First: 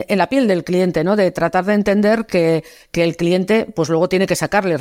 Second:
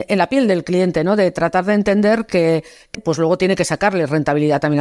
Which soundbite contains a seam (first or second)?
second